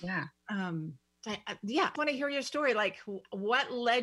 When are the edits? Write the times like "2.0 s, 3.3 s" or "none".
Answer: 1.9 s